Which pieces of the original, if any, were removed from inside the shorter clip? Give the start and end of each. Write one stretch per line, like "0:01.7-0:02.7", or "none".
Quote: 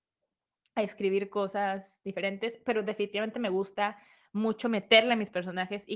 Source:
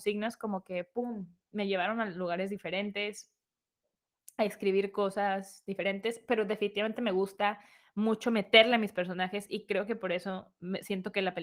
none